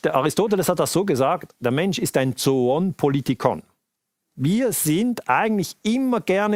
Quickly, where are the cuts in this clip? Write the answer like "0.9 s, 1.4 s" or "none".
none